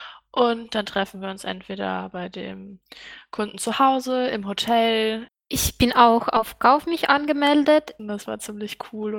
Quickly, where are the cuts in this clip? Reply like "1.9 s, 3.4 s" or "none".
5.3 s, 8.0 s